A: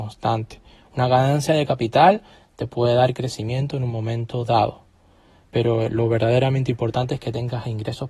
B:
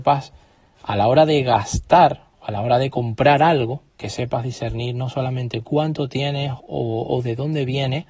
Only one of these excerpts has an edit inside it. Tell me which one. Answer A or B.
B